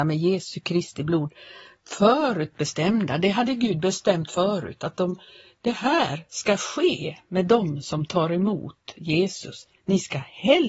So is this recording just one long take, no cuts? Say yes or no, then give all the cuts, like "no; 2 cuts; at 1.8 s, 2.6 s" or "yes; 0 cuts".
yes; 0 cuts